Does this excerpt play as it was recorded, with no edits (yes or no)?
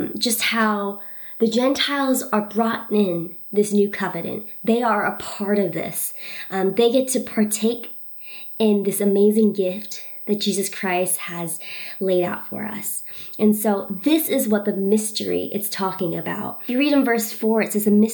yes